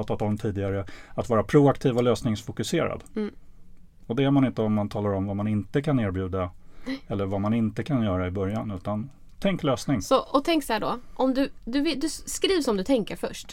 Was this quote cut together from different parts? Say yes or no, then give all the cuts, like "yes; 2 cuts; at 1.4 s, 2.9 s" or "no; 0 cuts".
no; 0 cuts